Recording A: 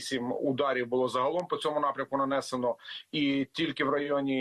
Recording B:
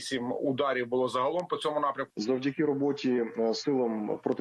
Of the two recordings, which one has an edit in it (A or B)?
B